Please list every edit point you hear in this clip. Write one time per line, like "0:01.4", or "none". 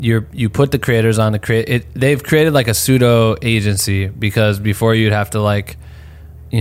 none